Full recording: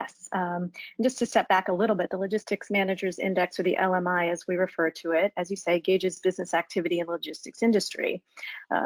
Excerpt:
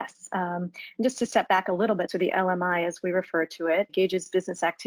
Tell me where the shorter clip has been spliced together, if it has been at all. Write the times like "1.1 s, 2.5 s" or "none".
2.1 s, 3.9 s